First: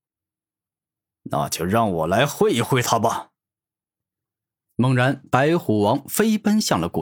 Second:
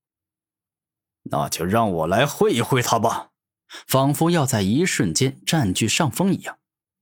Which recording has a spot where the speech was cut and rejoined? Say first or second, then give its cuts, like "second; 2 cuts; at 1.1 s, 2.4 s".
second; 1 cut; at 3.6 s